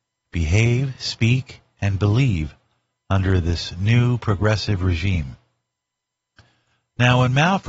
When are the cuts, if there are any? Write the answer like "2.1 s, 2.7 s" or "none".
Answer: none